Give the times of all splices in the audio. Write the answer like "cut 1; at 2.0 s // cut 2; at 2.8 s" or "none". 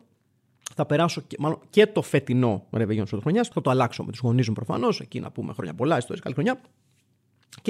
cut 1; at 3.5 s